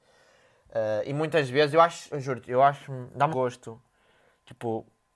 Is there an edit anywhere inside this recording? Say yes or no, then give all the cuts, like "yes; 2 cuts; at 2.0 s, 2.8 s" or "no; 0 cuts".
yes; 2 cuts; at 2.1 s, 3.3 s